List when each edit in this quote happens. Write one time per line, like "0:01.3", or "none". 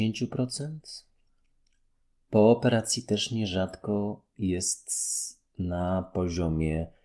none